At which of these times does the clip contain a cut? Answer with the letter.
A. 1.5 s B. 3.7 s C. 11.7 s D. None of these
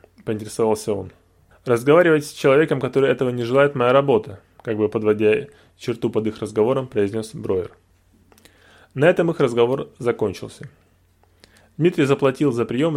A